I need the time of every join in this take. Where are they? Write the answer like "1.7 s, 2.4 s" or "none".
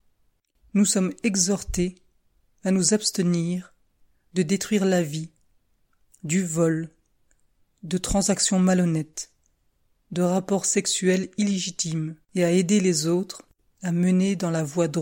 12.2 s